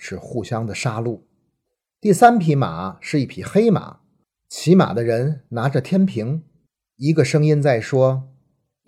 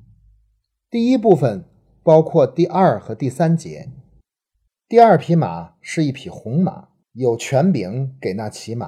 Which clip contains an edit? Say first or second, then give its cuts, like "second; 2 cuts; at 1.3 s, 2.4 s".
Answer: second; 1 cut; at 4.7 s